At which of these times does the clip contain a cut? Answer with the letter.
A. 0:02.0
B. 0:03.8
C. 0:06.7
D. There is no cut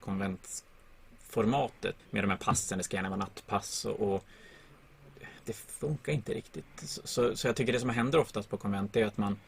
A